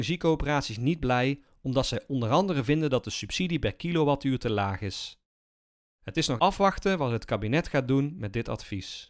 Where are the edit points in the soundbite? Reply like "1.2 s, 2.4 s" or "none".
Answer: 6.4 s